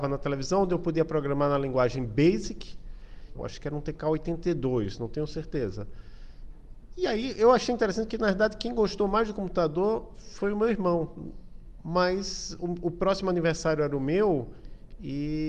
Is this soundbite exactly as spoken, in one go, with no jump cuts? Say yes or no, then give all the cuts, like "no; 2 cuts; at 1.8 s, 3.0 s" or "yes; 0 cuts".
no; 1 cut; at 3.3 s